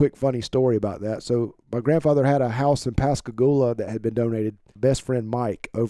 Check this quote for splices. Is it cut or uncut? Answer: cut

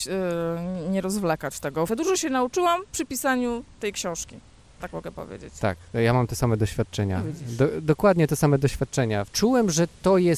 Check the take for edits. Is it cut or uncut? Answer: cut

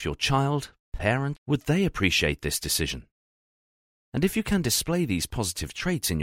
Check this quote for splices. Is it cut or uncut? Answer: cut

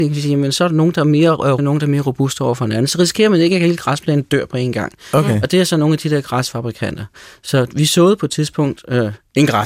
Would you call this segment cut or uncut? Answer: cut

